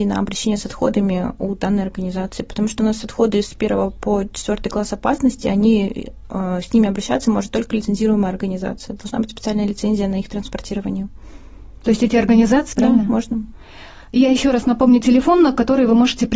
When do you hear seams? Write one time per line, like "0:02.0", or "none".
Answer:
0:12.7